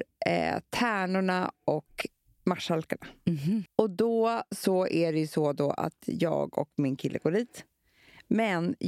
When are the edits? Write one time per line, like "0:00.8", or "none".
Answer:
0:03.7